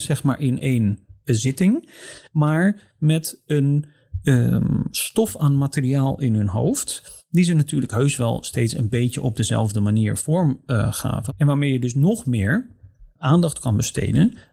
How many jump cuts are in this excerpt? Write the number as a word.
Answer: two